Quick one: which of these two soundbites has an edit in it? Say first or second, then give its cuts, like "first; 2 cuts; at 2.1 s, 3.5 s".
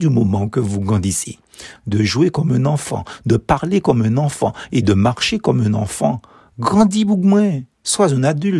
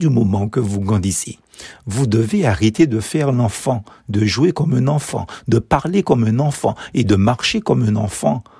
first; 1 cut; at 1.8 s